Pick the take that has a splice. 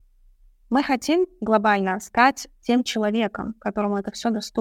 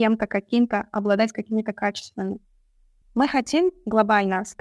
second; 1 cut; at 3.0 s

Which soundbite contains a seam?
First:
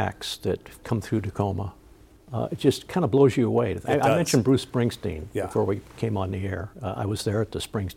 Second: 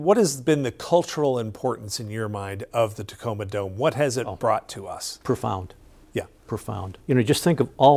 second; 1 cut; at 7.0 s

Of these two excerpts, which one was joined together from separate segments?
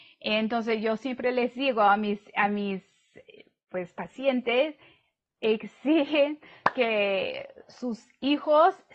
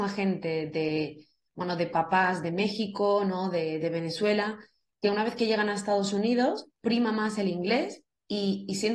first; 1 cut; at 5.4 s

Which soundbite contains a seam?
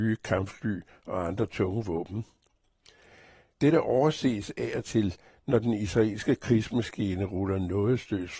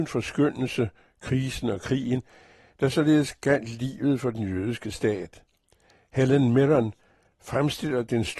first; 1 cut; at 3.5 s

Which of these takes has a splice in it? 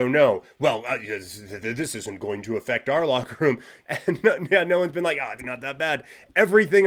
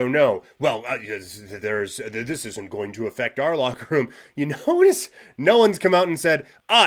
first; 3 cuts; at 1.6 s, 3.8 s, 5.4 s

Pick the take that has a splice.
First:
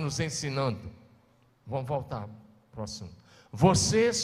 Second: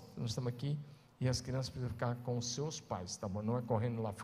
first; 1 cut; at 1.5 s

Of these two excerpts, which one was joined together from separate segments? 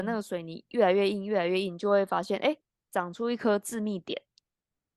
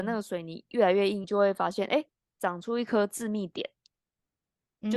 second; 1 cut; at 1.2 s

